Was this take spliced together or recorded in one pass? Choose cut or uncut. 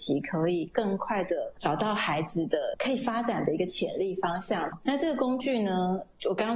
cut